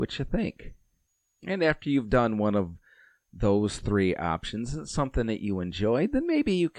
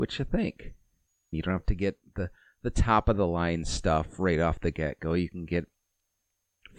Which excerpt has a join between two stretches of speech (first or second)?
second